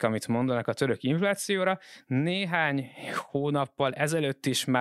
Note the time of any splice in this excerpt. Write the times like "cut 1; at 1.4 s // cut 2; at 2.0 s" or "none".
none